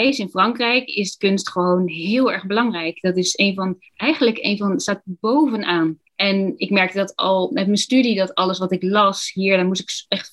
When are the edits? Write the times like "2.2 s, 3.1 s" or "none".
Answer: 6.1 s

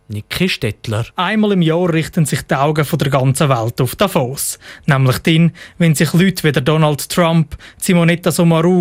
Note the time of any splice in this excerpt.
1.1 s

